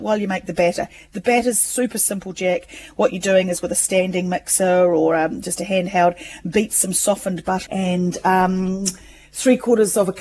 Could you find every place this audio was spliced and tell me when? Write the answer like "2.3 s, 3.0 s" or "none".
7.7 s